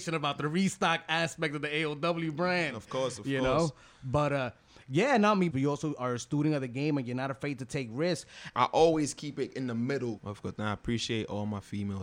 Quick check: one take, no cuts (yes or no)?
no